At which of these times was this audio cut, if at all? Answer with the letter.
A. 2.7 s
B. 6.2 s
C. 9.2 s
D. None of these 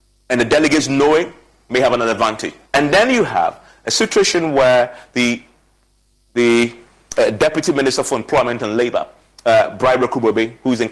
A